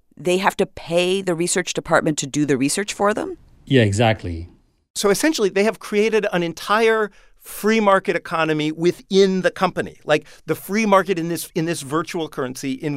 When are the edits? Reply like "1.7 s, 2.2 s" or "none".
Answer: none

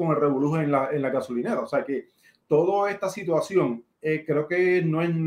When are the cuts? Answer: 3.9 s

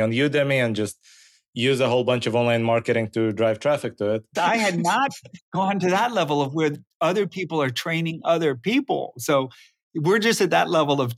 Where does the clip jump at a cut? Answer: 4.4 s

